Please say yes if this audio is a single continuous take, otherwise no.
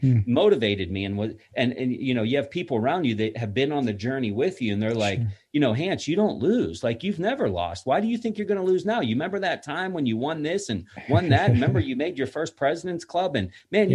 yes